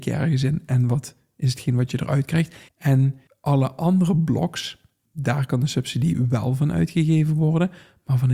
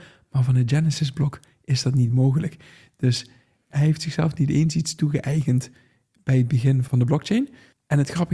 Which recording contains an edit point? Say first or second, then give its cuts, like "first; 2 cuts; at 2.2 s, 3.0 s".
first; 1 cut; at 2.7 s